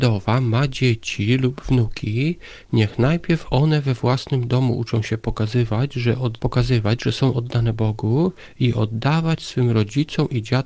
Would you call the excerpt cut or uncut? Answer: uncut